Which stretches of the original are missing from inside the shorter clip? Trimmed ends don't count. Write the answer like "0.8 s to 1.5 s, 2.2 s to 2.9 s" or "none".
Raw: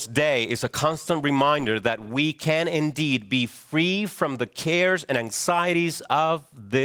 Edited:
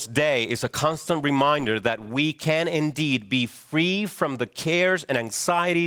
none